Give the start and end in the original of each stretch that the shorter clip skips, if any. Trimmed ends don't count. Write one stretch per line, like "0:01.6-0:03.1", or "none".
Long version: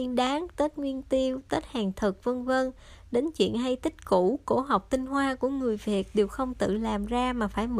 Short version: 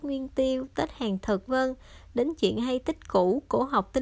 0:02.2-0:02.4